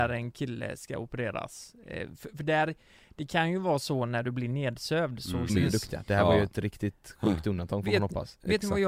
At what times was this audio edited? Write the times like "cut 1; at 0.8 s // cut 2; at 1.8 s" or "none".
cut 1; at 5.5 s